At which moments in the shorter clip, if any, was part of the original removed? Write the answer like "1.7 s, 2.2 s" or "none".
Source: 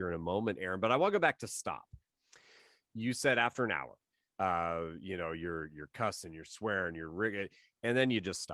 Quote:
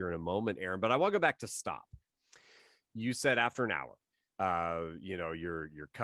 none